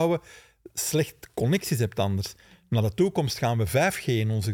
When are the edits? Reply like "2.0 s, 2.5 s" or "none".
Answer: none